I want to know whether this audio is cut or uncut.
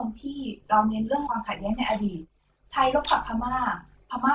uncut